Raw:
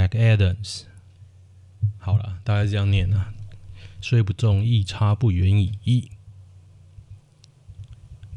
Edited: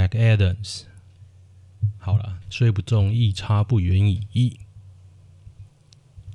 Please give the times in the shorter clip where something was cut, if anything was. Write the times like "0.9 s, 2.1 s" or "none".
2.4 s